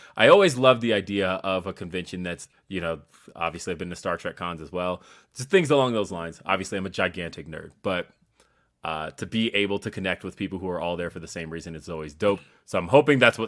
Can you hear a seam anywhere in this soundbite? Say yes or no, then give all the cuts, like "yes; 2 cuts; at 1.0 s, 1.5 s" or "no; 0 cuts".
no; 0 cuts